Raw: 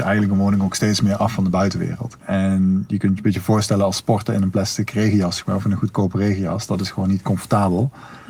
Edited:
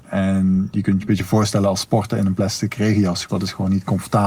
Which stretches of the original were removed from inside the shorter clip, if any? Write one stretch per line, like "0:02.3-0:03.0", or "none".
0:05.4-0:06.7